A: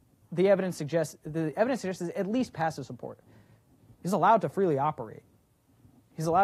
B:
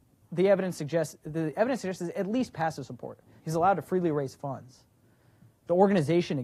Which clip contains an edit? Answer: B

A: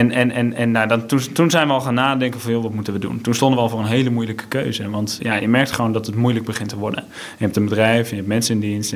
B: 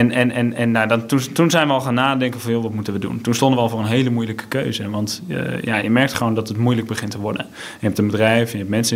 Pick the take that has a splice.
A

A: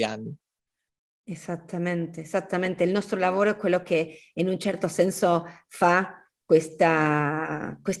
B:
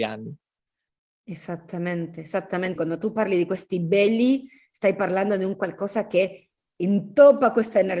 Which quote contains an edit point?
B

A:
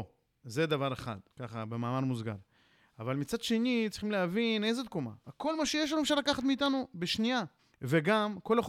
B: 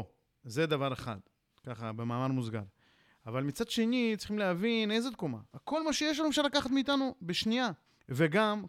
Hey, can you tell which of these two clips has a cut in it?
A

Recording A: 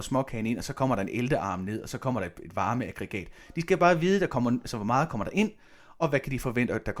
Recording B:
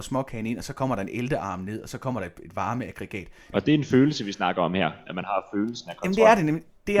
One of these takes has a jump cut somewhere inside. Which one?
B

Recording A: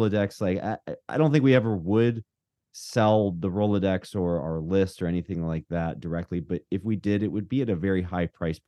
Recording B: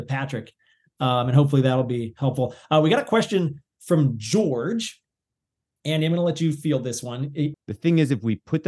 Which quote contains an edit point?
B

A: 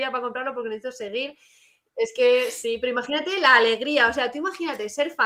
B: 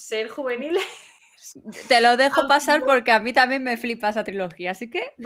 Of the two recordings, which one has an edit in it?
A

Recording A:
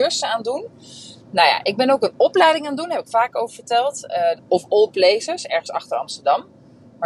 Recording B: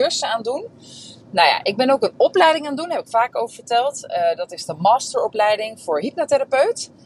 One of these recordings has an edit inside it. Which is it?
A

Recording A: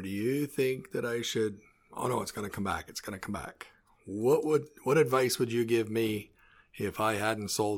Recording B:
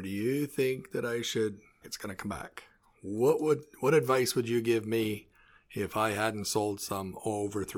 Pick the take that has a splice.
B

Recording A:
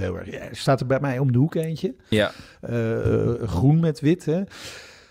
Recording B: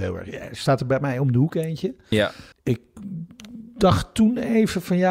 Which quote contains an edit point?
B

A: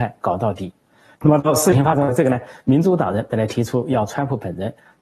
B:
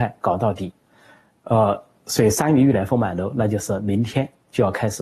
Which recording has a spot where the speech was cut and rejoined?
A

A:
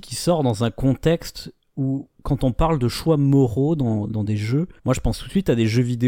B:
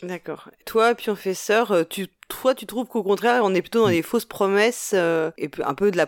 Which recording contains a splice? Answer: A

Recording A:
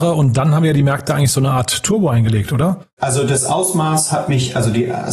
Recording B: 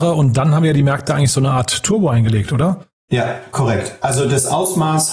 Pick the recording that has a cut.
A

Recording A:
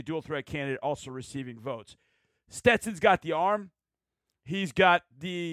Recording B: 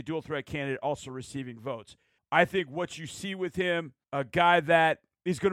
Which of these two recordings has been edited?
B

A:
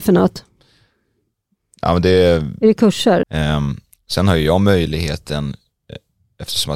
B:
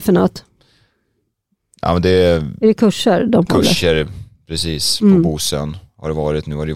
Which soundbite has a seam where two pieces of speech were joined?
A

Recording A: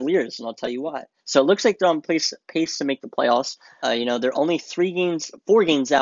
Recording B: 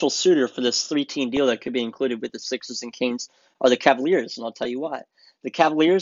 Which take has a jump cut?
A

